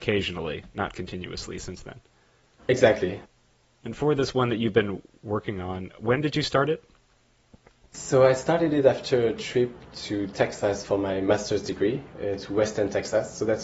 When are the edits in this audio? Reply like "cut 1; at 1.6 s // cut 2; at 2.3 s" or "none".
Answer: cut 1; at 3.2 s